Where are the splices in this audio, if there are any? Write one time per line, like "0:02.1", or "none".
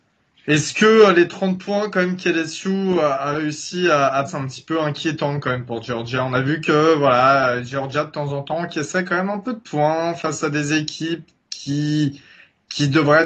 0:04.3